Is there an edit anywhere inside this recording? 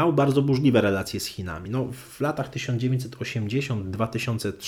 no; 0 cuts

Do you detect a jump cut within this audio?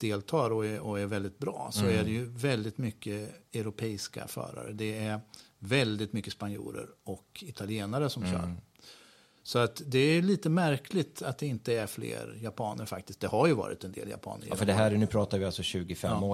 no; 0 cuts

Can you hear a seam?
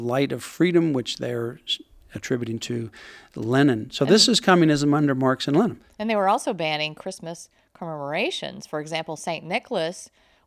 no; 0 cuts

